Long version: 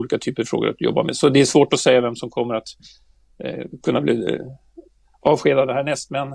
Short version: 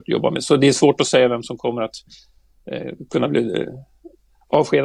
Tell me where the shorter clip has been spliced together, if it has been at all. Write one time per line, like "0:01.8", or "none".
none